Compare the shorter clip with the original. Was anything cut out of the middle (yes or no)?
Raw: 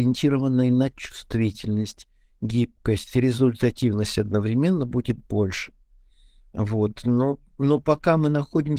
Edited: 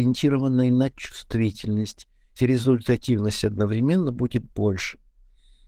yes